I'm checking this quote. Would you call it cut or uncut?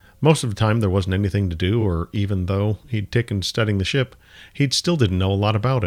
uncut